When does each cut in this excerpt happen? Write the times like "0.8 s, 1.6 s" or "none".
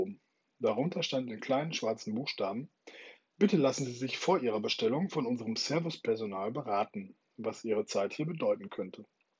none